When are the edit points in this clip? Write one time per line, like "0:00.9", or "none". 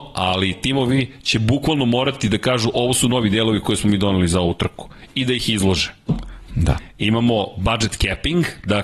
0:06.5

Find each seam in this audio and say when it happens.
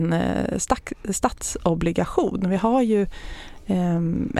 none

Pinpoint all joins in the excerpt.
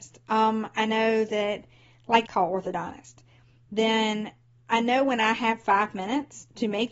0:02.3

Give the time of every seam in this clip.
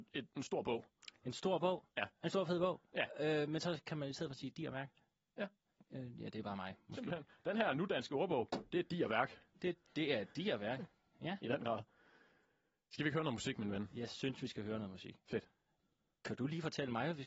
none

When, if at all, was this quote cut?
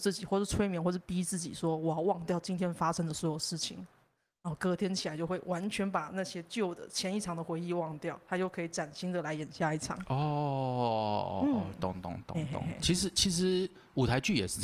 none

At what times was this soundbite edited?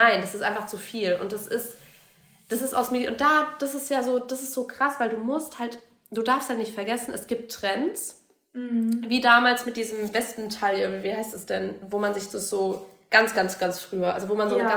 none

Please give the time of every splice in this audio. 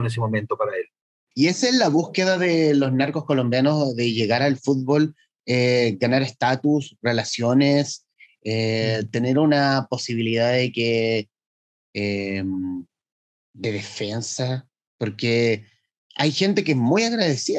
0:01.3

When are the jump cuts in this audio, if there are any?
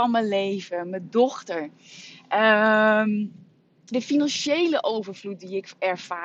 0:03.9

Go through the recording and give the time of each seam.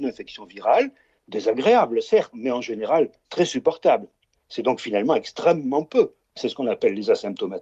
0:04.3
0:06.2

